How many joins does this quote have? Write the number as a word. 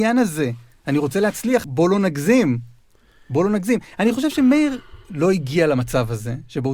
one